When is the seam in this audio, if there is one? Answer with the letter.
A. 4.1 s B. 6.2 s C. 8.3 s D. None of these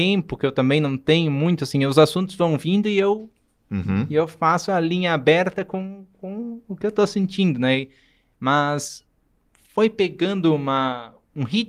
C